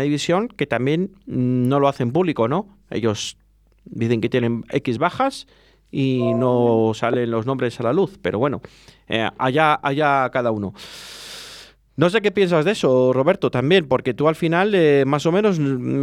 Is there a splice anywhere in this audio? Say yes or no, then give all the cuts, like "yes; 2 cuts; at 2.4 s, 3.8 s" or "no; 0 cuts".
no; 0 cuts